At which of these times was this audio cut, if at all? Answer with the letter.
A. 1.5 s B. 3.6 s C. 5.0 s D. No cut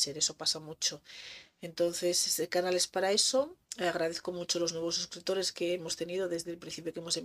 B